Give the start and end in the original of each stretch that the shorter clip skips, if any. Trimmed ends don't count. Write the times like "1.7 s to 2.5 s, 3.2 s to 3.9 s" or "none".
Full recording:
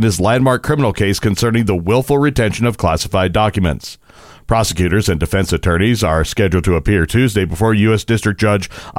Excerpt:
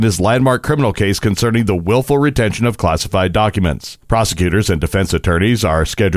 4.0 s to 4.4 s